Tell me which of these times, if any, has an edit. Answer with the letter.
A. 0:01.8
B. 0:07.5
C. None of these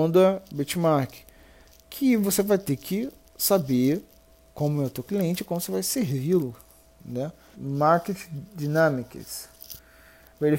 B